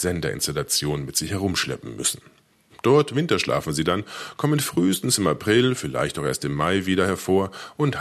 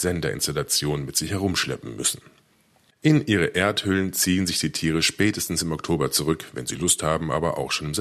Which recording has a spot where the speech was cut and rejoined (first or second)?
first